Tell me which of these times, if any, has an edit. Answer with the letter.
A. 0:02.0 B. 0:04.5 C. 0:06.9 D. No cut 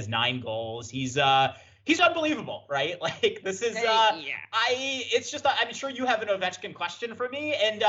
A